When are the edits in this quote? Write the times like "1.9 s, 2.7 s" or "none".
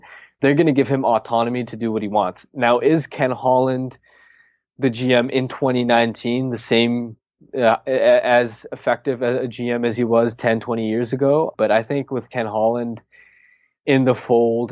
11.5 s